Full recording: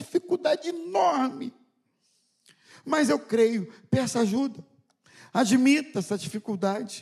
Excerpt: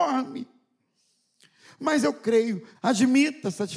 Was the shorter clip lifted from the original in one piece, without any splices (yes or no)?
no